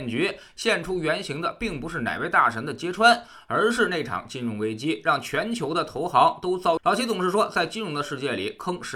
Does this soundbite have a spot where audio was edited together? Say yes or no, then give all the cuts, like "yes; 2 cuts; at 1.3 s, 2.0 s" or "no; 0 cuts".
yes; 1 cut; at 6.8 s